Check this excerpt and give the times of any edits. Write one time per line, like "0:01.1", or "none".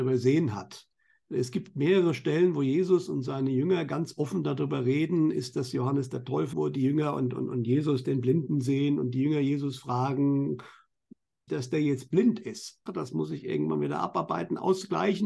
0:06.5
0:11.5
0:12.9